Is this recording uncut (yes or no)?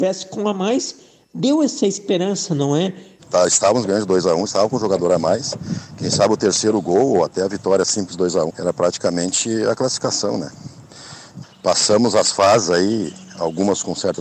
no